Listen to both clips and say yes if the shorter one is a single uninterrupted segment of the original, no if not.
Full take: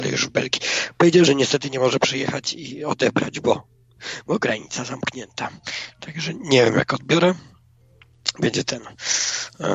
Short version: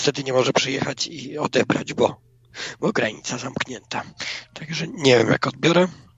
yes